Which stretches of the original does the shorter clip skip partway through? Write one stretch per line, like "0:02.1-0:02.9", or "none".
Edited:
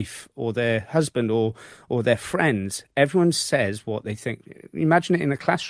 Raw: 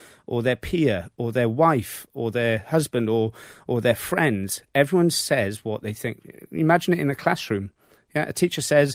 none